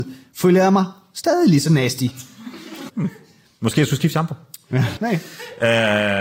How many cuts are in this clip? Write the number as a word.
two